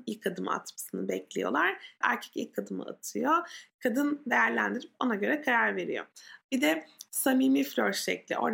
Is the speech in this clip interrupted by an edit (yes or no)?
yes